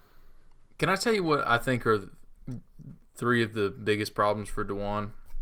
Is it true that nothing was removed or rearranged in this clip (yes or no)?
yes